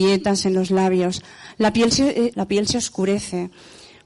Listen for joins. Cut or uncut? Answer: cut